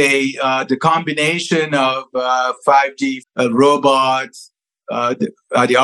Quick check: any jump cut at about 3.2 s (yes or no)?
yes